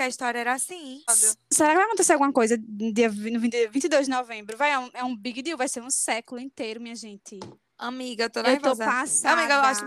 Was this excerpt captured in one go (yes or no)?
no